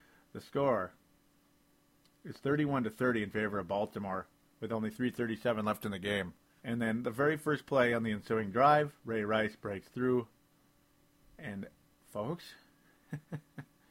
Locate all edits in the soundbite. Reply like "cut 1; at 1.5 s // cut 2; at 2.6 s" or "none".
cut 1; at 6.6 s